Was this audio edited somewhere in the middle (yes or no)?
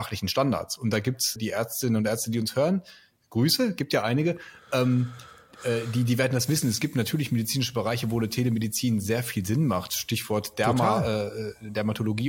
yes